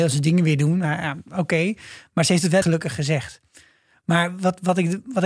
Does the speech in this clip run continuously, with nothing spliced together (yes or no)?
no